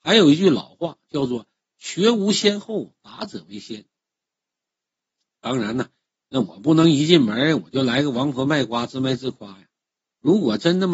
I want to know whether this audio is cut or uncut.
uncut